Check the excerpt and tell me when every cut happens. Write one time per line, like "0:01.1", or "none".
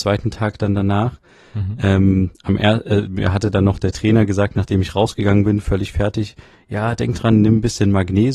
none